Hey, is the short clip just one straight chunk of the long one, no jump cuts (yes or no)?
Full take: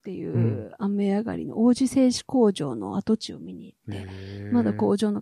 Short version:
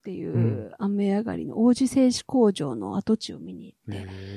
yes